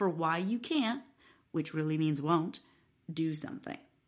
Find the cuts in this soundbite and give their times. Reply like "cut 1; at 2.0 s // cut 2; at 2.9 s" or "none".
none